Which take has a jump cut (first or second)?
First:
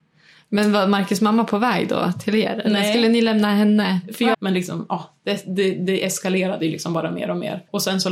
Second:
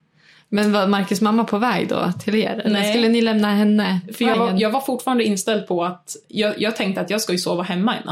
first